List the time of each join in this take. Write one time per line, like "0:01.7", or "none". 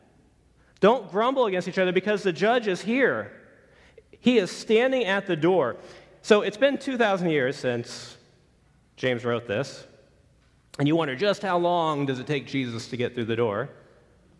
none